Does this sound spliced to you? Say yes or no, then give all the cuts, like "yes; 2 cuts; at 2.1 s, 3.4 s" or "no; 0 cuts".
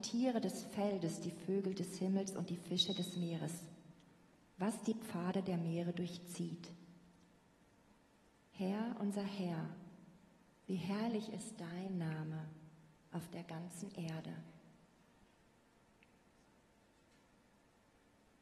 no; 0 cuts